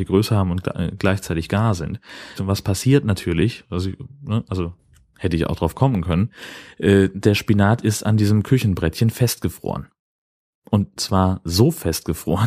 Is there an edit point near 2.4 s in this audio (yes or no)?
yes